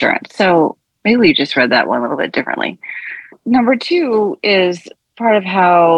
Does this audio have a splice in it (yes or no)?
no